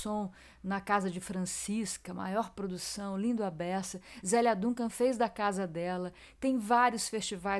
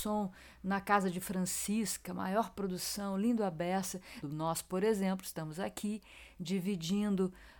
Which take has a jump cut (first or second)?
second